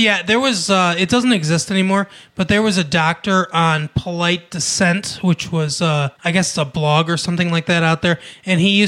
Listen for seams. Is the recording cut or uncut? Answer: cut